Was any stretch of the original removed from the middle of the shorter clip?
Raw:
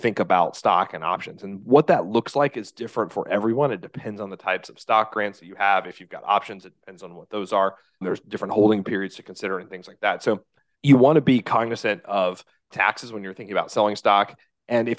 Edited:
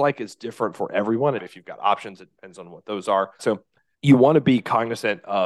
yes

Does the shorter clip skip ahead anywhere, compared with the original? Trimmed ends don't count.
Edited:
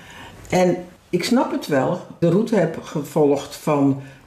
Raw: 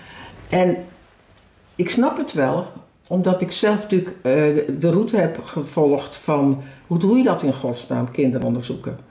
yes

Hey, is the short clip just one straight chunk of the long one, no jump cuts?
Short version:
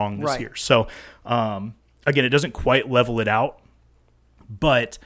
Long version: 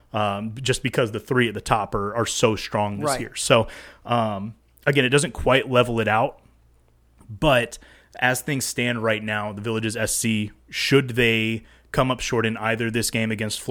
yes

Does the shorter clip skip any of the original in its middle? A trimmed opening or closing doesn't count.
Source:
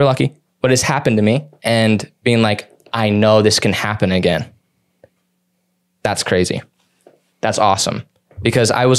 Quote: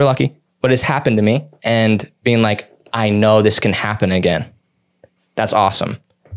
yes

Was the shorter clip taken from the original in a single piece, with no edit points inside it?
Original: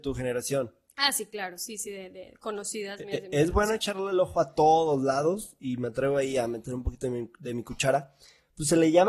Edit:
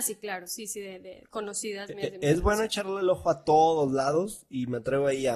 yes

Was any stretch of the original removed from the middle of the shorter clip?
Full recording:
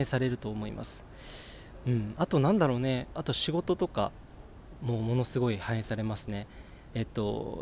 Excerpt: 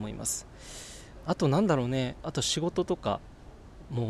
yes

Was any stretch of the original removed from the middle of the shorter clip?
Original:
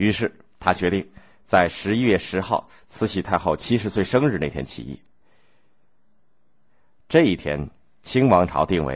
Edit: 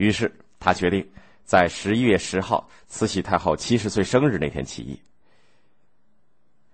no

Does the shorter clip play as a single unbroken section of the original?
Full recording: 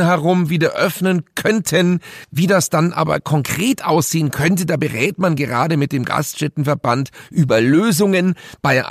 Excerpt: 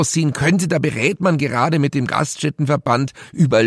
yes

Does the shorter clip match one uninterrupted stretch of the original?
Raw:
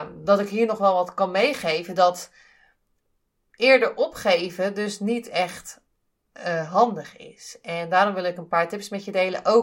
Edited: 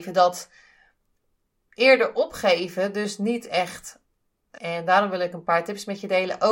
no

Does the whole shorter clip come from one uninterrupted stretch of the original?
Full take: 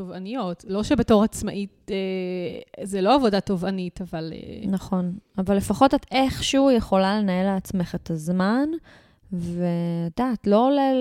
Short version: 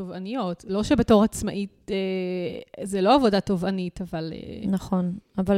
yes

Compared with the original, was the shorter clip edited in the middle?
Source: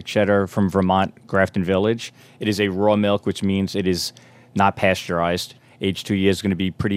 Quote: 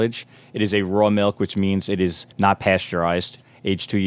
yes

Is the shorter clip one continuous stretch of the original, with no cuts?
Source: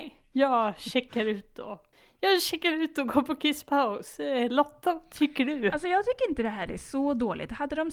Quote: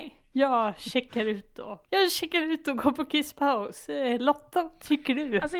no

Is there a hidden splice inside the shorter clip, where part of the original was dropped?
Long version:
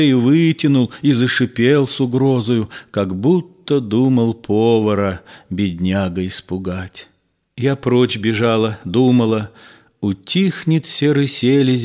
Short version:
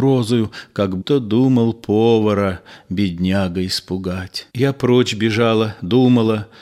yes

